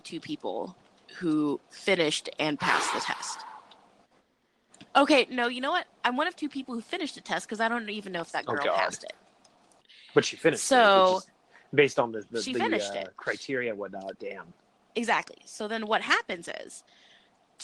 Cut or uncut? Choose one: cut